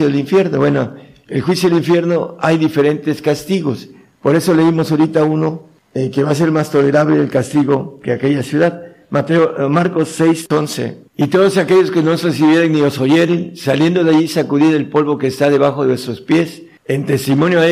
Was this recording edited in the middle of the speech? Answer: no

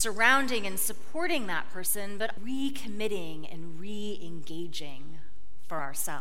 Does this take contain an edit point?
yes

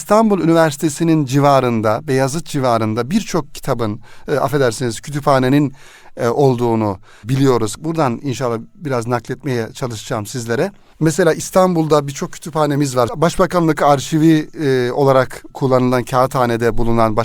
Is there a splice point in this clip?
yes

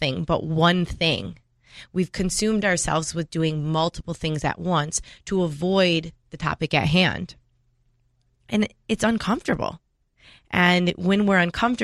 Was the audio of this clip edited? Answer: no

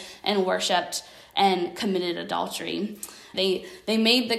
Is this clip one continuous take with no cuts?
no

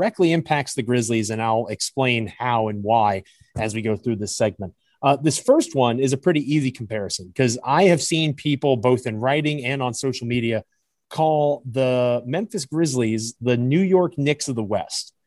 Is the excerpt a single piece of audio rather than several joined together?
yes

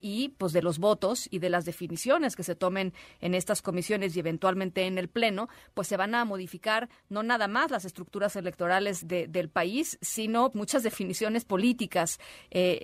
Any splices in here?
yes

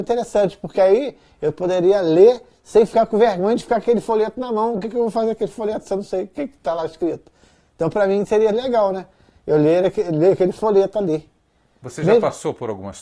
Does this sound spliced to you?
no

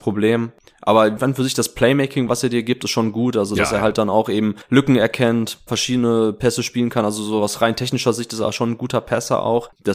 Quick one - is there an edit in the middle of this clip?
yes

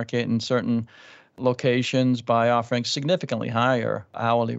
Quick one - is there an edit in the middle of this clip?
no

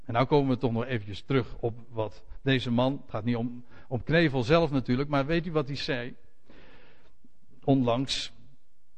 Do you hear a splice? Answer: no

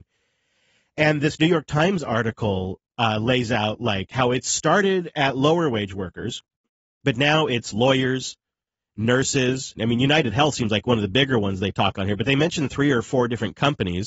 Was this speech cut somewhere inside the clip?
yes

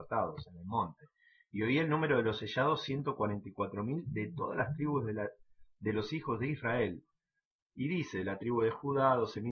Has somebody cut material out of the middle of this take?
no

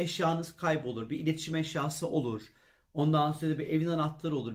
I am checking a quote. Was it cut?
no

